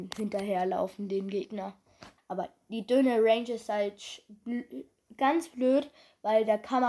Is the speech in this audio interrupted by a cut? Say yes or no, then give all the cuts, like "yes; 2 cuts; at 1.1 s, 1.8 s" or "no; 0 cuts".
yes; 1 cut; at 2.2 s